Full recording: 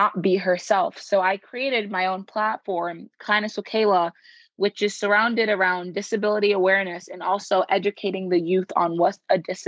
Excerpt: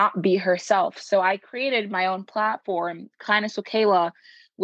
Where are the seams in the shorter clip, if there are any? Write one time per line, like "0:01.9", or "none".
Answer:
none